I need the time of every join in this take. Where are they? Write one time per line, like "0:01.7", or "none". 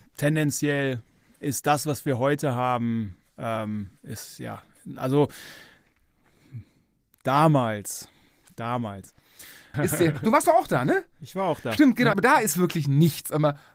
0:09.7
0:12.1